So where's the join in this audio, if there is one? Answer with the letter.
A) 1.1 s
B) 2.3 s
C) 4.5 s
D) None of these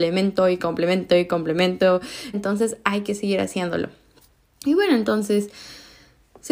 B